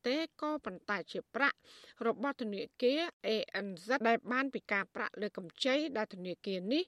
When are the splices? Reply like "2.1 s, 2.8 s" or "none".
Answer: 4.0 s

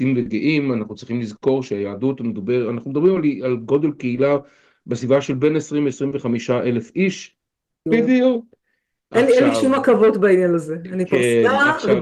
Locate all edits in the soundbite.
7.9 s

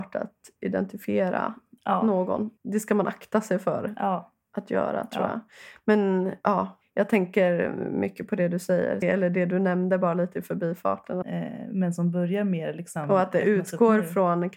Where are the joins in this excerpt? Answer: 9.0 s, 11.2 s

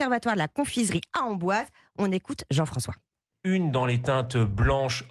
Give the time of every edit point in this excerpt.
none

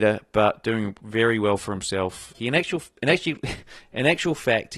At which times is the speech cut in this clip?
2.3 s

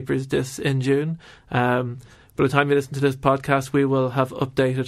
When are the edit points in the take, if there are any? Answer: none

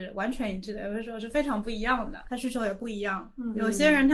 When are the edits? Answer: 2.3 s

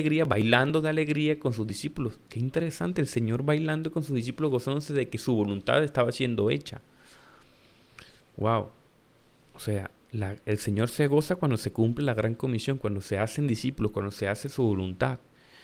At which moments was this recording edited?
none

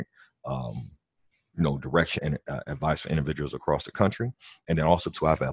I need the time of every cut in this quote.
2.2 s

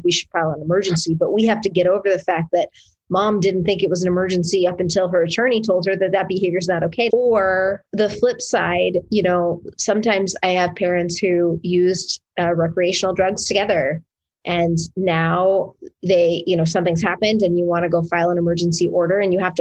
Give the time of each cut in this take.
7.1 s

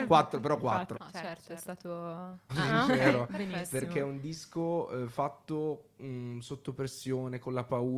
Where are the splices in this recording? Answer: 0.9 s, 2.5 s

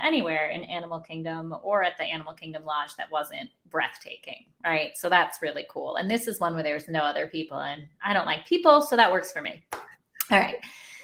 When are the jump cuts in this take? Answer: none

